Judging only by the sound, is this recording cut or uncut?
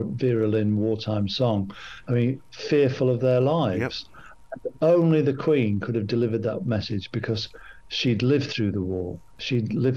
cut